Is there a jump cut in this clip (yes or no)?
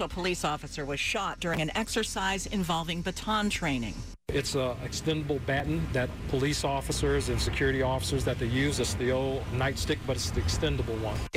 yes